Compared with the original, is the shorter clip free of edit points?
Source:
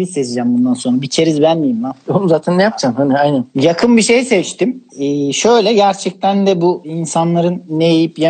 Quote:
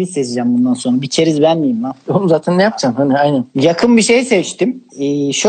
yes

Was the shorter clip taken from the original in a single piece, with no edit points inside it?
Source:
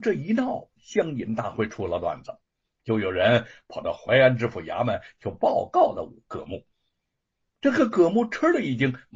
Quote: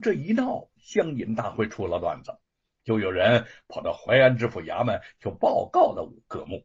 yes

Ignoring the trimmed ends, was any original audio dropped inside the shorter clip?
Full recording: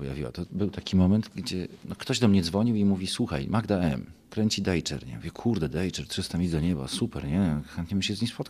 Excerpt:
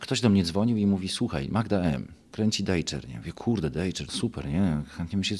yes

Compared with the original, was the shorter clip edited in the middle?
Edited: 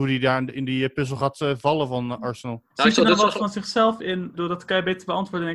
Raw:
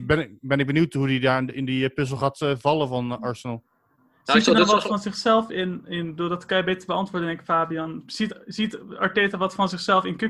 yes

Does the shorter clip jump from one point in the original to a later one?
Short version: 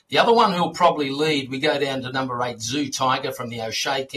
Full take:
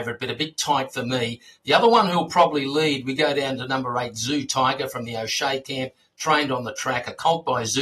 no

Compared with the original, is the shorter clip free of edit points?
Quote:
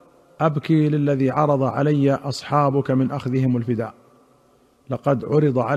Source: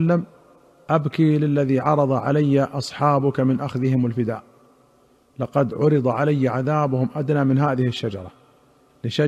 yes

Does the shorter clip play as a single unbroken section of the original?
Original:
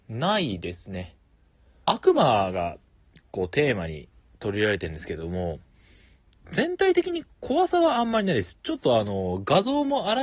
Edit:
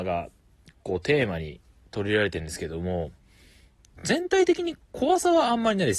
yes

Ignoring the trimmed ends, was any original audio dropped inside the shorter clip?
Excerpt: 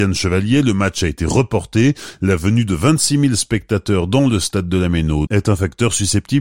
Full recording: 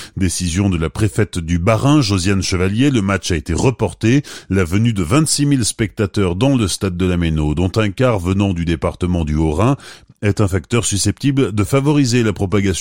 yes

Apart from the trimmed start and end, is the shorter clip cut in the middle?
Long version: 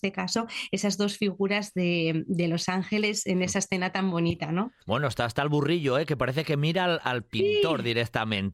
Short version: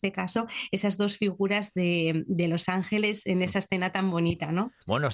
no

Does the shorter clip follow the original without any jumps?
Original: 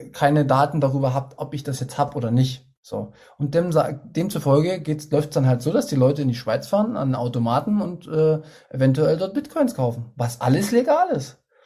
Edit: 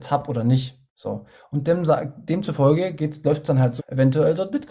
no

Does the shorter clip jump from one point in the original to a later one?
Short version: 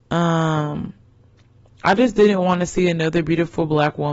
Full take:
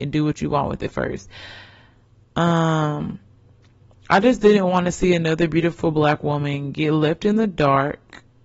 no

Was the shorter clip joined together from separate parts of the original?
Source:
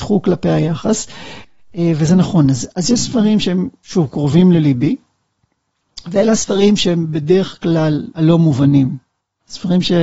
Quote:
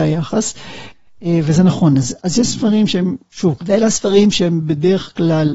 yes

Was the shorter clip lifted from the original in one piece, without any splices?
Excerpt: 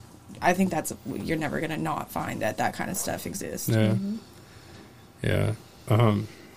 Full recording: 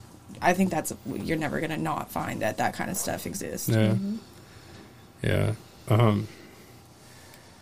yes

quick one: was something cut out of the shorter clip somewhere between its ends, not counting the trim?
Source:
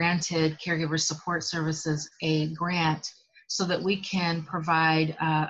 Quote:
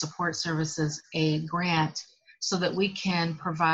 no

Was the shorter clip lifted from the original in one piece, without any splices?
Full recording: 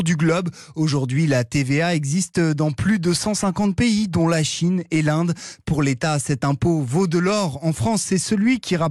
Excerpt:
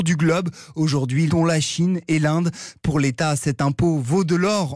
no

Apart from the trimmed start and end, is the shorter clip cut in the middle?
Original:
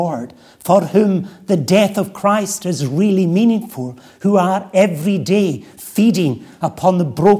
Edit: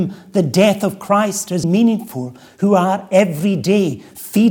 yes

